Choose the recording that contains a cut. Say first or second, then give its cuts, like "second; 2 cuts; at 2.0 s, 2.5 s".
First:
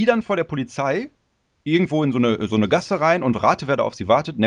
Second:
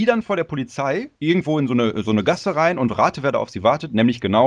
second; 1 cut; at 1.2 s